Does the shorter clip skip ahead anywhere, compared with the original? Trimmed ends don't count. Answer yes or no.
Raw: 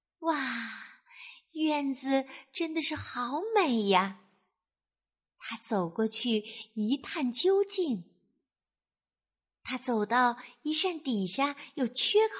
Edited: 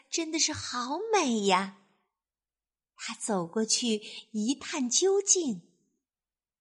no